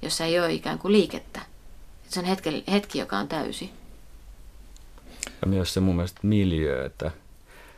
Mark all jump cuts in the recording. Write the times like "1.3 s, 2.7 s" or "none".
none